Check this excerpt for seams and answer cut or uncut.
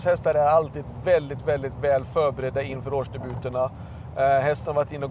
uncut